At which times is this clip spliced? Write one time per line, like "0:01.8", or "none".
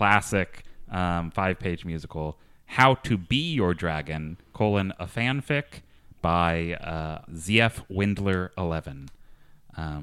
0:07.3